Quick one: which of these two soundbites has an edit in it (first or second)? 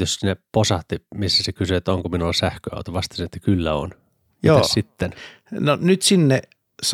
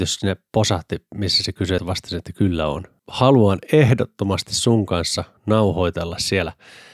second